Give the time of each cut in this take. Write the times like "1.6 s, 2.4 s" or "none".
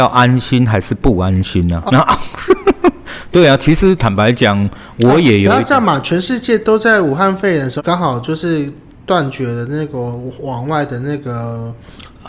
1.9 s, 7.8 s